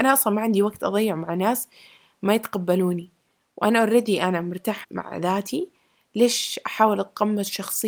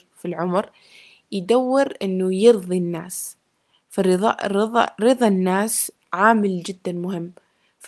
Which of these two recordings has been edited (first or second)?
first